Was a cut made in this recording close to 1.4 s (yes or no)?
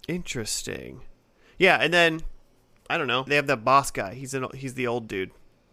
no